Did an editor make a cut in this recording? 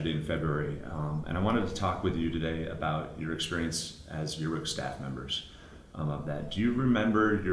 no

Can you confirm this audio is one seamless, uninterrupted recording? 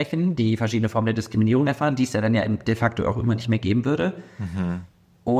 yes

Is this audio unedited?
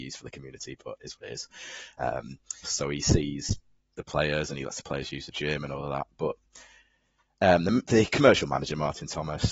no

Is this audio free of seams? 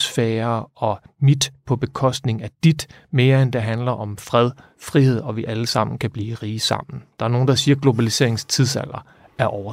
yes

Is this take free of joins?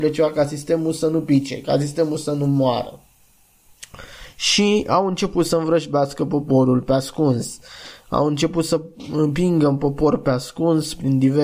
yes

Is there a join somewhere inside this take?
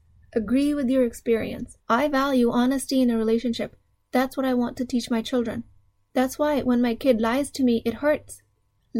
yes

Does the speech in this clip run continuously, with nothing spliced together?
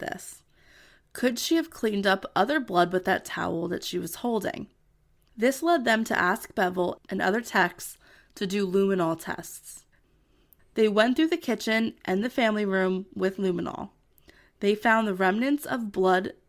no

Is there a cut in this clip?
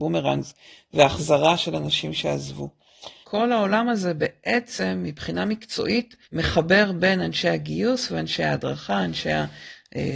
yes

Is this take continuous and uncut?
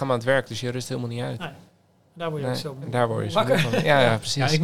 yes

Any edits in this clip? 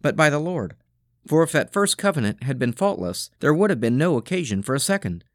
yes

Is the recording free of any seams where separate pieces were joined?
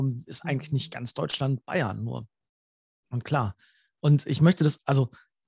yes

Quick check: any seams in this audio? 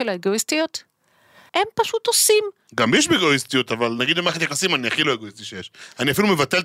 yes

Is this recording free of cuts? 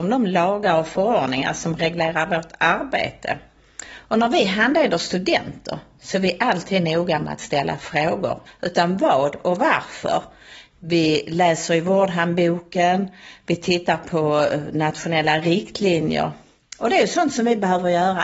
no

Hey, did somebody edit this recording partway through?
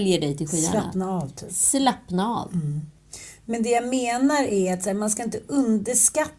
no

